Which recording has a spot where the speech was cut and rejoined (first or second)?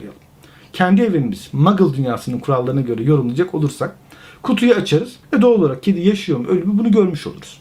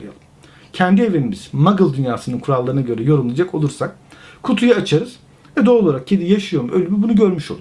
first